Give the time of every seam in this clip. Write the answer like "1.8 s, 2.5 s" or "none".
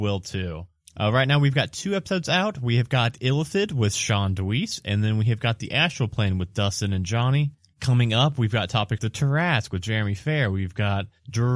9.0 s